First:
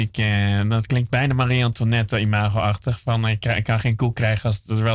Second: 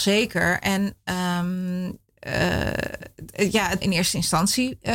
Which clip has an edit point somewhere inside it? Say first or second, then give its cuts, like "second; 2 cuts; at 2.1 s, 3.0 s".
second; 1 cut; at 3.8 s